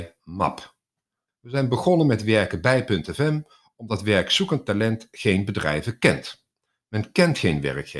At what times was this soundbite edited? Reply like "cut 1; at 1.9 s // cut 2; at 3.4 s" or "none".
cut 1; at 1.3 s